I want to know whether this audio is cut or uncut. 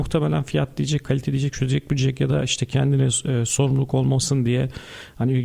uncut